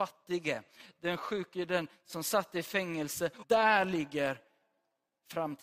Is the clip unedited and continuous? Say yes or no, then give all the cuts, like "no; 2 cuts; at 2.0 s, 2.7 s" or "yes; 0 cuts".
no; 1 cut; at 3.4 s